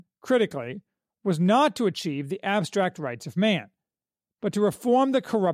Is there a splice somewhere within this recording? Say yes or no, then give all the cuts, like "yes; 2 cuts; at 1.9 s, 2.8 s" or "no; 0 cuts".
no; 0 cuts